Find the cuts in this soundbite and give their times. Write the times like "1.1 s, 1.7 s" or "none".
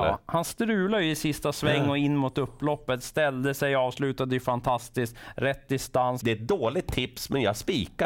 6.2 s

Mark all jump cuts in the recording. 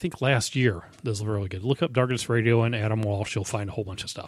none

